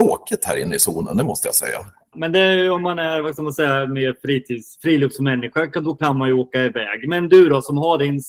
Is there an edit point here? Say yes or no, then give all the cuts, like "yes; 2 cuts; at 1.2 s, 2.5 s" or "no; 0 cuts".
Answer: yes; 1 cut; at 2.1 s